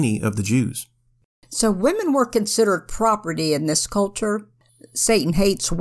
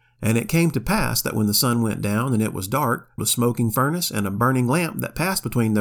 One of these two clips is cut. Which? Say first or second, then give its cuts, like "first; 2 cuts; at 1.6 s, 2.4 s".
second; 1 cut; at 3.2 s